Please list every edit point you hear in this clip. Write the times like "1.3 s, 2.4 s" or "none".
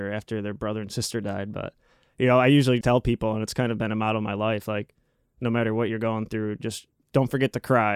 2.8 s